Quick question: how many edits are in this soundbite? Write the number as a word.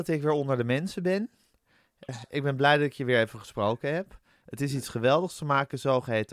two